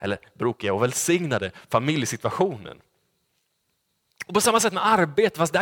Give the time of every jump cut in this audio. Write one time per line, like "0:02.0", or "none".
none